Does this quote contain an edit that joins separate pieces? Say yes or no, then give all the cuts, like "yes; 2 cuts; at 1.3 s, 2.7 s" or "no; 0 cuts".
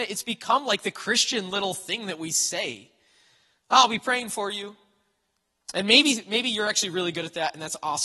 no; 0 cuts